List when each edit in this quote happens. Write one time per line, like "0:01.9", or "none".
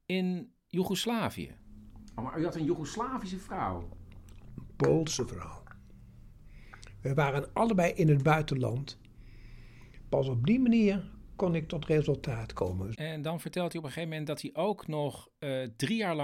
0:12.9